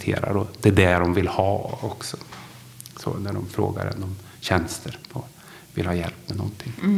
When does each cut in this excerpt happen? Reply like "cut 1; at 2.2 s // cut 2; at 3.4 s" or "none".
none

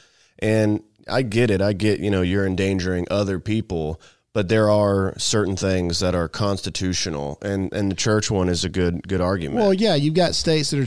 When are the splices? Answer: none

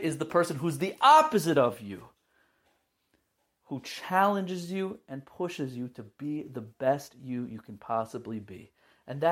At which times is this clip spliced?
none

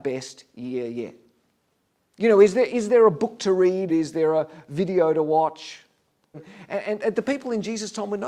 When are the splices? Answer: cut 1; at 3.9 s // cut 2; at 6.3 s

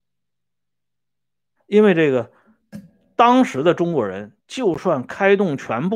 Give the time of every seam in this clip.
cut 1; at 1.6 s

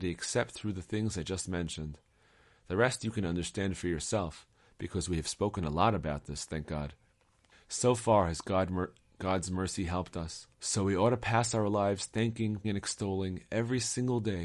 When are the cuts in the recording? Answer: cut 1; at 7.5 s // cut 2; at 10.5 s // cut 3; at 12.6 s

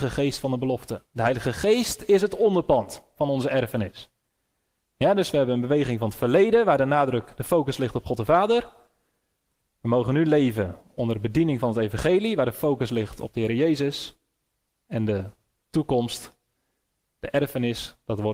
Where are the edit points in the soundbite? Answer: none

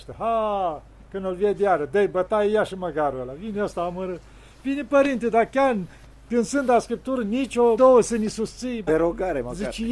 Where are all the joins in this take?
cut 1; at 7.8 s // cut 2; at 8.9 s

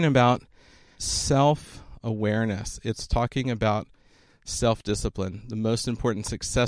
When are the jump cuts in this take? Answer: cut 1; at 1.0 s

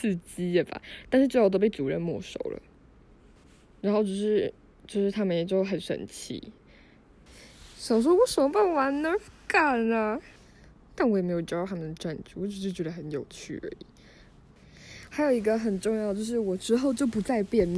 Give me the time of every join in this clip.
none

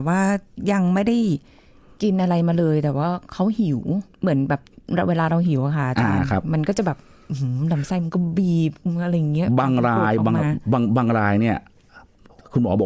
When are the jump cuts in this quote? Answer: cut 1; at 4.1 s

